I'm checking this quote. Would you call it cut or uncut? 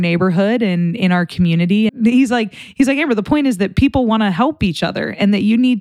cut